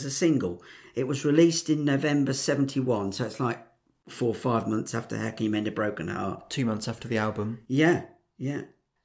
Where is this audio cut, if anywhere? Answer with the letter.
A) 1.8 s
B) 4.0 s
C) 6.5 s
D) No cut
D